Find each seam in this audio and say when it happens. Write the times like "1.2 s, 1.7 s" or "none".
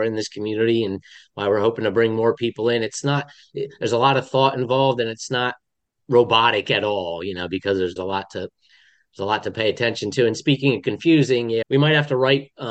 8.0 s, 11.6 s